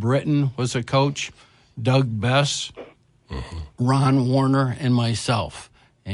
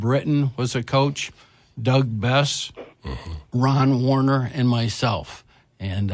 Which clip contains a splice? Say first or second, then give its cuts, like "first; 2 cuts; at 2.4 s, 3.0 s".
second; 1 cut; at 2.9 s